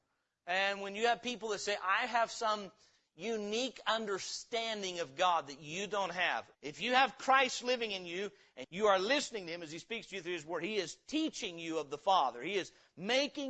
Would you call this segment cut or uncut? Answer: cut